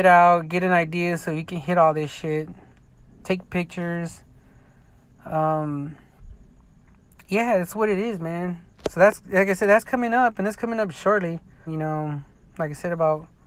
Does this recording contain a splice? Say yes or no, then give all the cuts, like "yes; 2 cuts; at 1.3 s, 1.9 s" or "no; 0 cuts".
yes; 1 cut; at 11.7 s